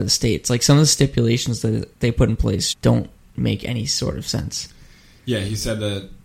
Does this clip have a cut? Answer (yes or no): yes